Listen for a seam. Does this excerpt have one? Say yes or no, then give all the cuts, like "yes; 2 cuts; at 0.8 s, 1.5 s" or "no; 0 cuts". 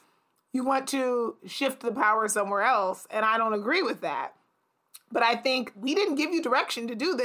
yes; 1 cut; at 5.7 s